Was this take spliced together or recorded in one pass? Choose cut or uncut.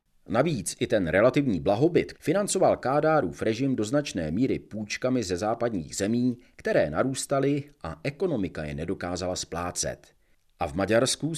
cut